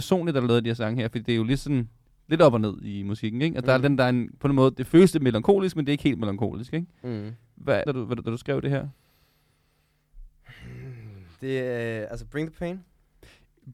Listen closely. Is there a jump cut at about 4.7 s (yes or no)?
no